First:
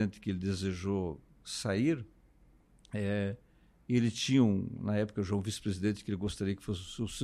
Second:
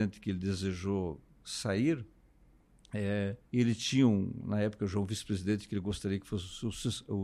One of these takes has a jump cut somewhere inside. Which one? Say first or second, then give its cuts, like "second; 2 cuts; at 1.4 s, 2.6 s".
second; 1 cut; at 3.4 s